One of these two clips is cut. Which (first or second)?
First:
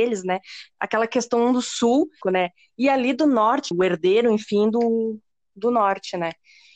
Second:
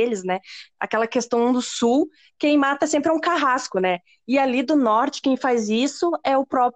first